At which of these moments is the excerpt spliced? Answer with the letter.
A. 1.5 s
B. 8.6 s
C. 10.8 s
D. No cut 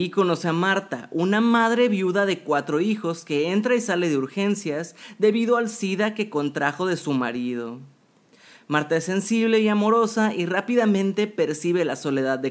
D